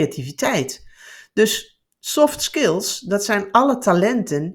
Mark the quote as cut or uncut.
uncut